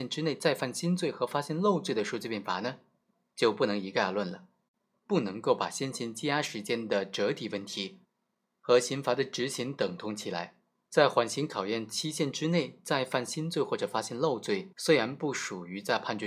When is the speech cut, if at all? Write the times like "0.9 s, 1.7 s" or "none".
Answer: 4.9 s, 14.7 s